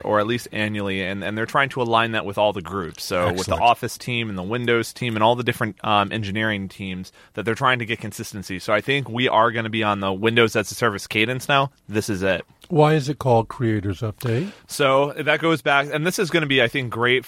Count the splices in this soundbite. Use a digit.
0